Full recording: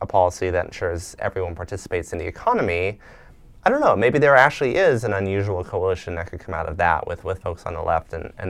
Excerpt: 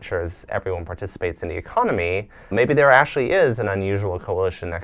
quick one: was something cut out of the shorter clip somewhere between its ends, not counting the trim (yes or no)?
yes